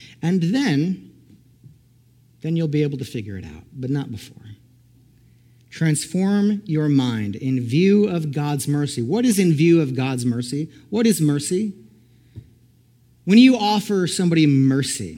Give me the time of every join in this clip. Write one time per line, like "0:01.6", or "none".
none